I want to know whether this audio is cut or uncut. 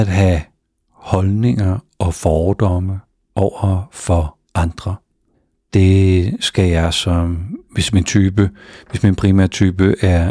uncut